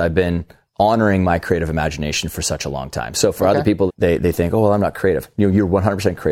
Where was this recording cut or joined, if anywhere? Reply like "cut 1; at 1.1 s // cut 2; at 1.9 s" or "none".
cut 1; at 3.9 s